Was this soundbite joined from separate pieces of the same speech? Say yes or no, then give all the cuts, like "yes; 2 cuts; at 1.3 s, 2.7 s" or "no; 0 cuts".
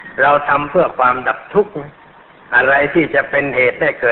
no; 0 cuts